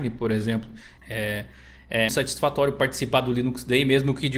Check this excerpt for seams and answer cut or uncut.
cut